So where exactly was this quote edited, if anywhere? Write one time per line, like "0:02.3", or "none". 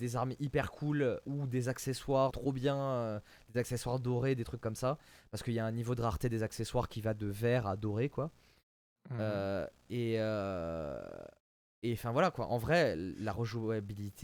0:02.3